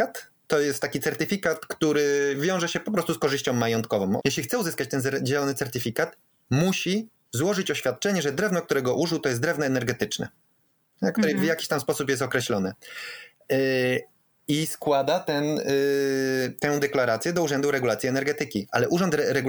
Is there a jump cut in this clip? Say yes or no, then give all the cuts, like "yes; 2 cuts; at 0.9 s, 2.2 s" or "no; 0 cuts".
yes; 1 cut; at 4.2 s